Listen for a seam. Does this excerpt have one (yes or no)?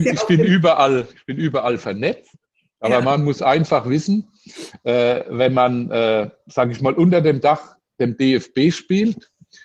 no